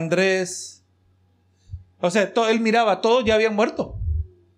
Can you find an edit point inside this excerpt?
no; 0 cuts

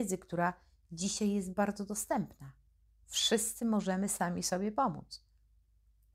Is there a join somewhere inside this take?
no; 0 cuts

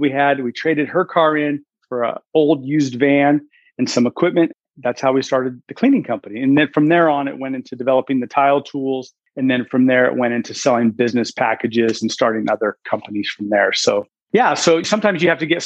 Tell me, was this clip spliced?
no; 0 cuts

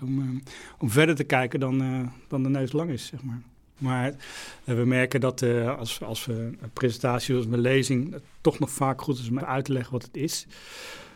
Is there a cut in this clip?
yes; 2 cuts; at 3.8 s, 9.4 s

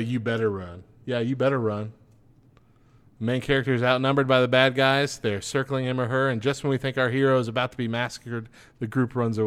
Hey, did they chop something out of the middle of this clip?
no; 0 cuts

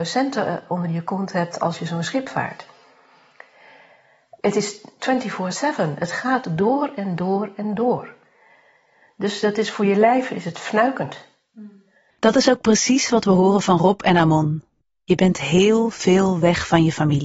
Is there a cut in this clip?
yes; 1 cut; at 12.1 s

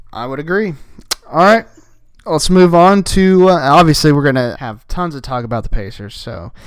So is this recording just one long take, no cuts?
no; 1 cut; at 4.5 s

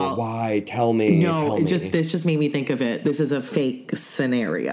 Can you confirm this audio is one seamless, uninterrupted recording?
yes; 0 cuts

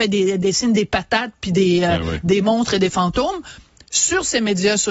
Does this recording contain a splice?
no; 0 cuts

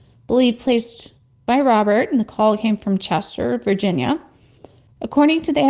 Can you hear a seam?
no; 0 cuts

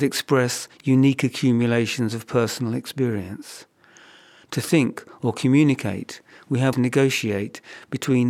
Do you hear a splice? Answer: yes; 1 cut; at 6.7 s

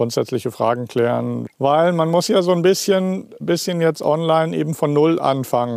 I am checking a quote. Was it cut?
yes; 2 cuts; at 1.5 s, 3.4 s

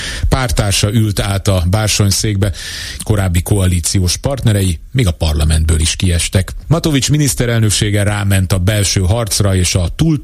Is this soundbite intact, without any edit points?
no; 2 cuts; at 3.0 s, 6.6 s

